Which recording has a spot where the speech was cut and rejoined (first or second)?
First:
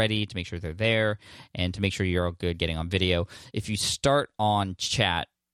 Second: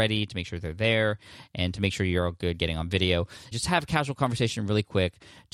second